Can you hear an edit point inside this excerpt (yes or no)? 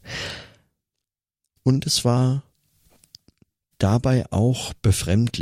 no